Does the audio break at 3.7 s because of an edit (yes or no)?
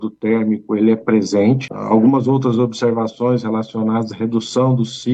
no